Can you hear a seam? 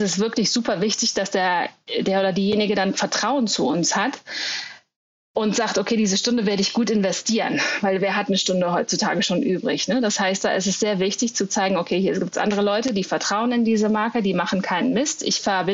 no; 0 cuts

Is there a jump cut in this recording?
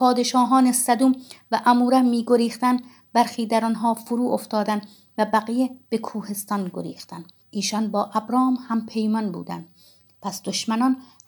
yes; 2 cuts; at 7.4 s, 10.1 s

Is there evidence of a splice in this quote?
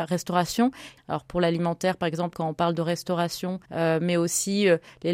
yes; 3 cuts; at 1.0 s, 2.3 s, 3.6 s

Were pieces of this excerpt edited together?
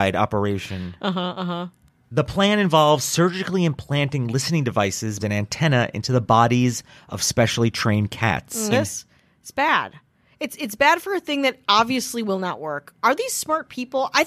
yes; 2 cuts; at 5.2 s, 8.7 s

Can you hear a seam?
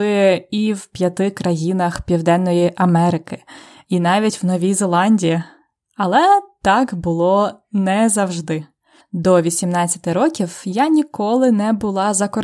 yes; 1 cut; at 3.8 s

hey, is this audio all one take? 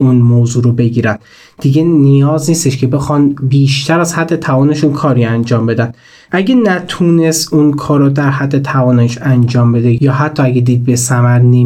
yes; 0 cuts

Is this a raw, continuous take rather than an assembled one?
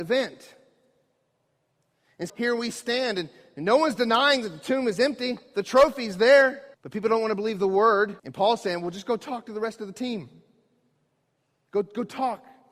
no; 3 cuts; at 2.3 s, 6.7 s, 8.2 s

